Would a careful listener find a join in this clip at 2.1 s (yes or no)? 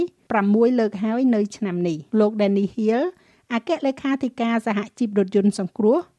yes